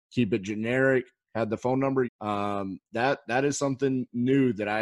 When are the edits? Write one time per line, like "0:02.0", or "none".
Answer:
0:02.0